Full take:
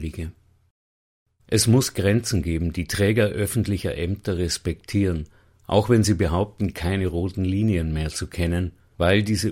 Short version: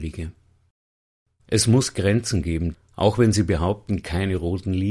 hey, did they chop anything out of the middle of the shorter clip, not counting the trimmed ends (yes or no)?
yes